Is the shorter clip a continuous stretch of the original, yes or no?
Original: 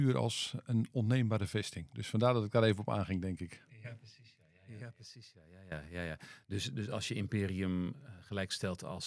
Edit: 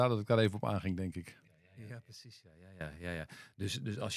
no